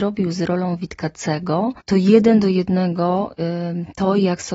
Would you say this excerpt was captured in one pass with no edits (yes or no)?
no